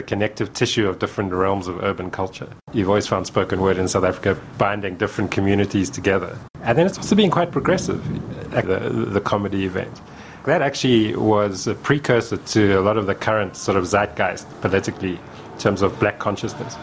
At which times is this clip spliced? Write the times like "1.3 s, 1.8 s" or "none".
8.6 s, 10.4 s